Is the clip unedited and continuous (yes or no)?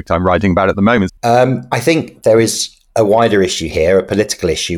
no